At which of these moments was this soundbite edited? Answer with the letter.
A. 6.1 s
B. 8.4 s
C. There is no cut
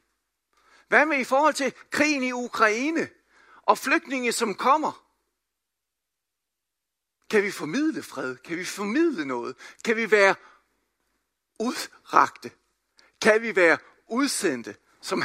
C